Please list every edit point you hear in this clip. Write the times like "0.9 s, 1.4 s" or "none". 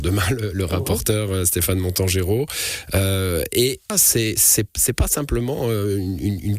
3.9 s